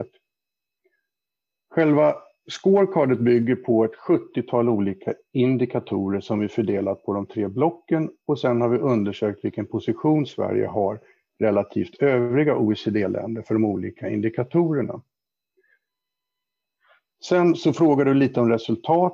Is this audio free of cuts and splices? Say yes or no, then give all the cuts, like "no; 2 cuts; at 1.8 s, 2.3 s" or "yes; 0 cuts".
yes; 0 cuts